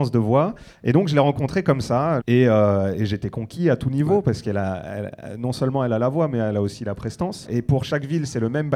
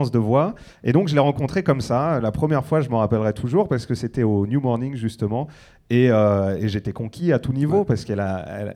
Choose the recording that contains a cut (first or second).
first